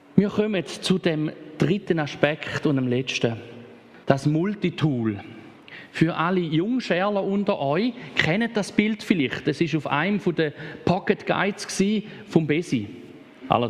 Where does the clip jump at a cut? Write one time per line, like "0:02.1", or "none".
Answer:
0:04.0